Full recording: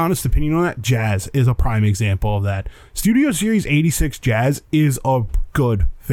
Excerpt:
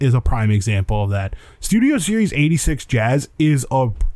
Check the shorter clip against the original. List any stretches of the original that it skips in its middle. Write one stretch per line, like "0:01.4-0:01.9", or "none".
none